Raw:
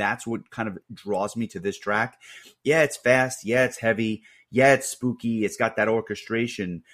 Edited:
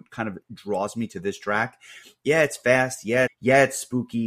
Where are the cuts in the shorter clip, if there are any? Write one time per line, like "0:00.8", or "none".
0:03.3